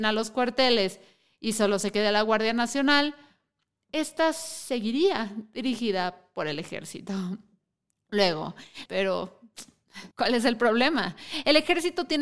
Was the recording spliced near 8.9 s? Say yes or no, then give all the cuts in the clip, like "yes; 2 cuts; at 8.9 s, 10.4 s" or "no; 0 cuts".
yes; 2 cuts; at 8.9 s, 10.1 s